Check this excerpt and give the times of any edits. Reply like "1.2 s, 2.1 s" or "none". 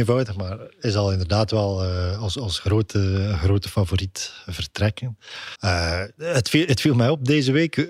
5.5 s